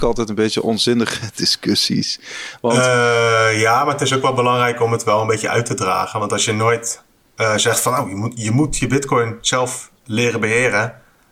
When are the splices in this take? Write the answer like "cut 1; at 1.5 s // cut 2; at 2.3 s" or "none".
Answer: none